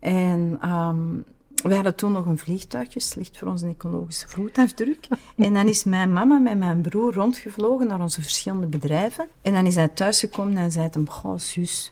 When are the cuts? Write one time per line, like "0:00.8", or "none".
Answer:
0:09.3